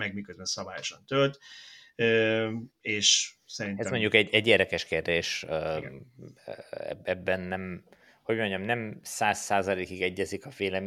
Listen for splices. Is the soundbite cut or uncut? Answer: uncut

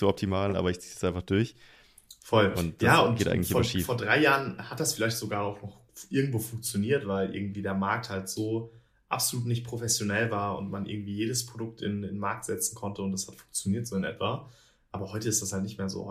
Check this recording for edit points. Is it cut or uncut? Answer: uncut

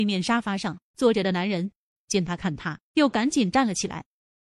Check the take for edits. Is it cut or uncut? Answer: cut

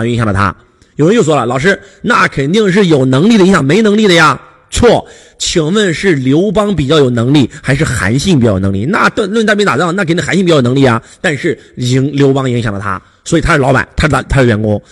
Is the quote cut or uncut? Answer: uncut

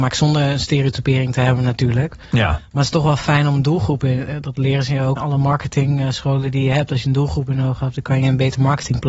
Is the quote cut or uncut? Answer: cut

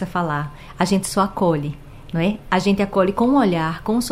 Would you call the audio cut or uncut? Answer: uncut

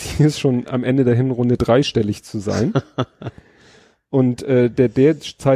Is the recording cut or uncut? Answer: uncut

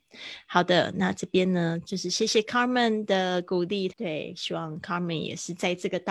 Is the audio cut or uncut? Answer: cut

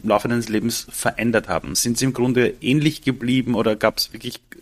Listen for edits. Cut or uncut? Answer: uncut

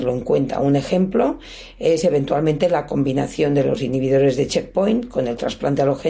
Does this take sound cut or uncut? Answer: uncut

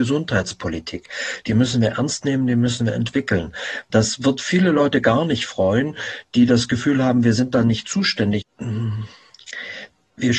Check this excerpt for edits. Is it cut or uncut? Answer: cut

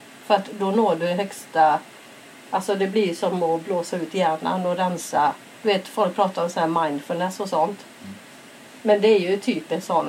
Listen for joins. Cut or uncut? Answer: uncut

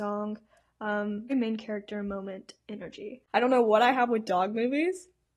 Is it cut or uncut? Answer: cut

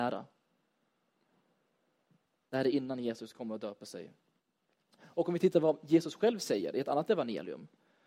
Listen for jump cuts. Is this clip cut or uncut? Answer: uncut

